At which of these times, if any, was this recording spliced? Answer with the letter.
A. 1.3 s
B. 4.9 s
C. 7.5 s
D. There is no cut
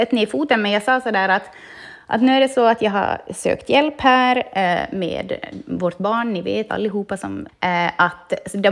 C